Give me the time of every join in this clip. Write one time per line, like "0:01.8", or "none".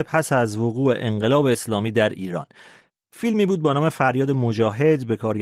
none